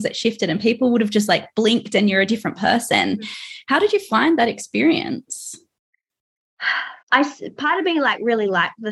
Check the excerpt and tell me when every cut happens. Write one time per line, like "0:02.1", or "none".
0:07.0

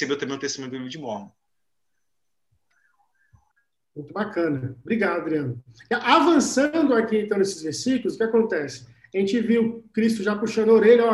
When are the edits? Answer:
none

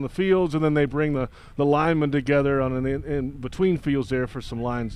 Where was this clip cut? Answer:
none

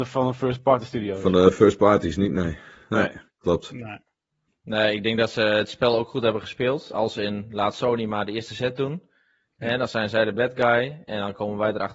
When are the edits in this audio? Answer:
0:04.5

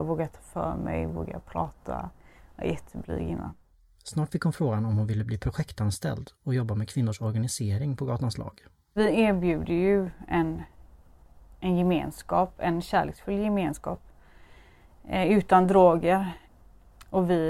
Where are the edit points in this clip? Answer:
none

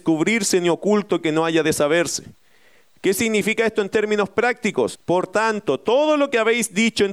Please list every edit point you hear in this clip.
0:04.9

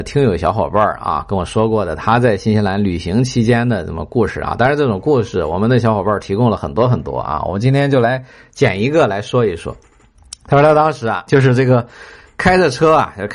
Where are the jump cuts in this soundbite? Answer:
none

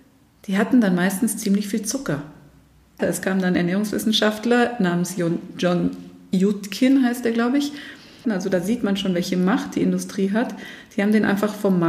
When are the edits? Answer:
0:03.0
0:08.2

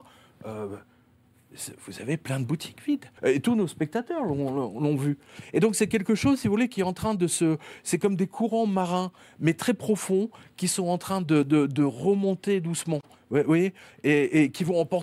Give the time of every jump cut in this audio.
0:03.2

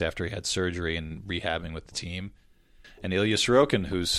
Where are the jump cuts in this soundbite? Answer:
none

